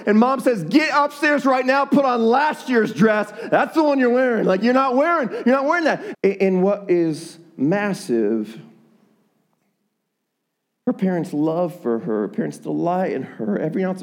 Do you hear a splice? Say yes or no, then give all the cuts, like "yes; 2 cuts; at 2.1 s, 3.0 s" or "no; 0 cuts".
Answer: yes; 1 cut; at 6.1 s